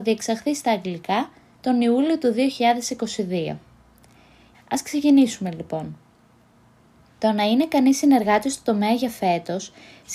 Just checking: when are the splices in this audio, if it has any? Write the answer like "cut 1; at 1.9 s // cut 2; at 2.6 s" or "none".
cut 1; at 4.5 s